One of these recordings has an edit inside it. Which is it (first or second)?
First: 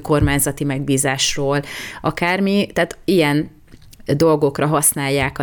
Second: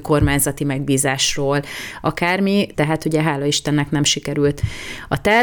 second